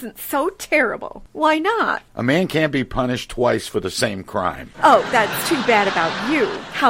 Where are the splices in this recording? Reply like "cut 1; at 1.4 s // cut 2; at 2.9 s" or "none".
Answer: cut 1; at 1.3 s